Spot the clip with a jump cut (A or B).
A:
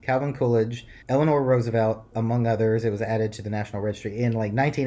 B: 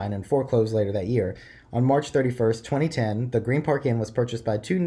A